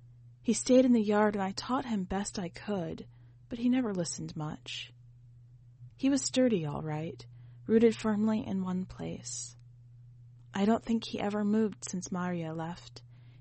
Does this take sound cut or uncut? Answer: uncut